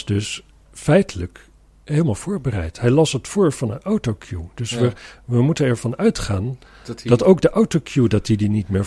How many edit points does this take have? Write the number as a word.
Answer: zero